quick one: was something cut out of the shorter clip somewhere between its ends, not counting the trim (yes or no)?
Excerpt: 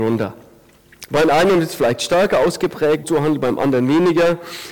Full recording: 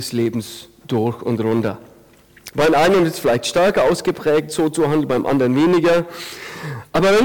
yes